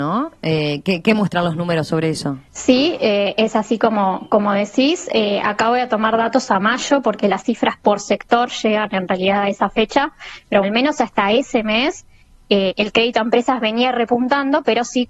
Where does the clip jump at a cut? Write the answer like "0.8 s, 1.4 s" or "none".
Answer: 2.5 s, 10.6 s